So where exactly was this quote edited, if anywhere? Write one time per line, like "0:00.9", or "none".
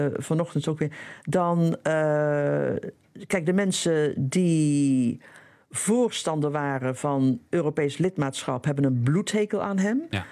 none